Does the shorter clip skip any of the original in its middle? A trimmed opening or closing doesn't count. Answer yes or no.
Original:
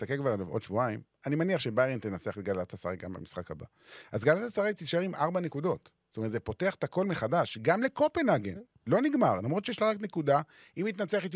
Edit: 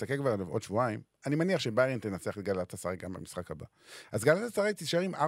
no